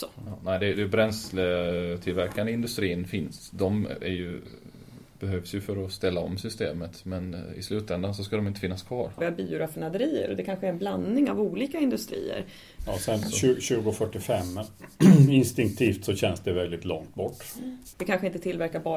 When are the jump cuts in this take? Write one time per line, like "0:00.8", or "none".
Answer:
0:09.2
0:12.8
0:17.9